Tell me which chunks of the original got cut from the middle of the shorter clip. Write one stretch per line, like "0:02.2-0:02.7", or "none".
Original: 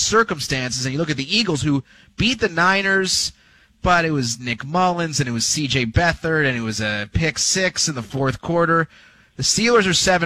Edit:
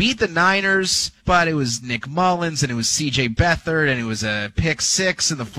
0:03.4-0:03.8